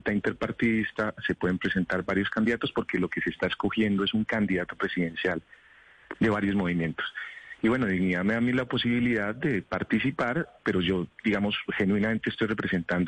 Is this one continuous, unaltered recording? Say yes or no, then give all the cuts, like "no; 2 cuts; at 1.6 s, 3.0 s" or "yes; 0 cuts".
yes; 0 cuts